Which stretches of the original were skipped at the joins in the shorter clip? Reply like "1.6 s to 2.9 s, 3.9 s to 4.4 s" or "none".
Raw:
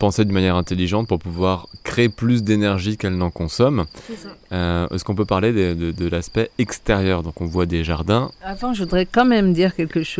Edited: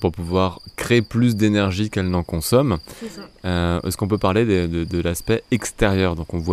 none